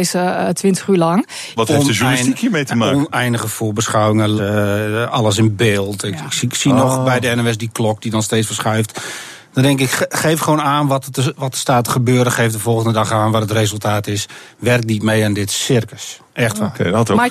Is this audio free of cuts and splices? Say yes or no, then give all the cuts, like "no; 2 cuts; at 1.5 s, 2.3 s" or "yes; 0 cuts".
no; 2 cuts; at 1.6 s, 4.4 s